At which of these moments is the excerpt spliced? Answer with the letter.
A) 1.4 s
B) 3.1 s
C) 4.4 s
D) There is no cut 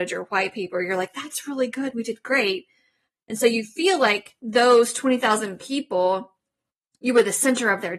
C